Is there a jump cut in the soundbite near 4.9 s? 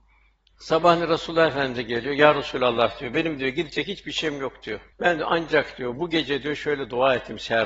yes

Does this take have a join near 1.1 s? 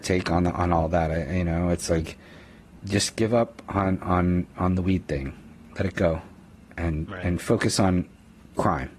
no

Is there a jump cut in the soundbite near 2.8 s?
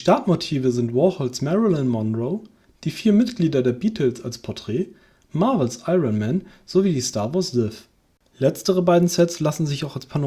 no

